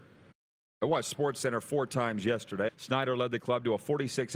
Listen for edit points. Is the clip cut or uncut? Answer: cut